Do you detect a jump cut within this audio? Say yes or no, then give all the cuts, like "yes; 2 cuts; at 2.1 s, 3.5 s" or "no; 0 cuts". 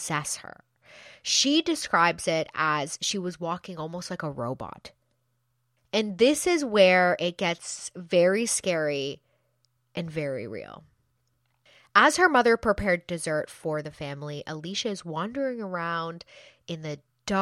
no; 0 cuts